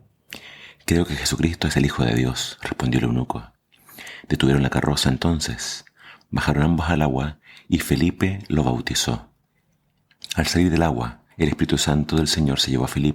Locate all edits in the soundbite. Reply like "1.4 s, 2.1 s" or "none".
11.3 s